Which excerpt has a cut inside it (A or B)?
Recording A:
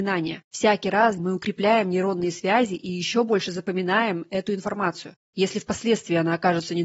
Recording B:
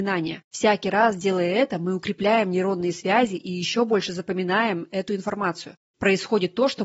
A